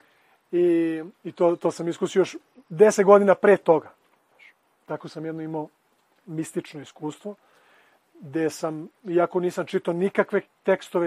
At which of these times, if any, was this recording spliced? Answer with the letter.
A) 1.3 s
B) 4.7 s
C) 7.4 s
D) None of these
D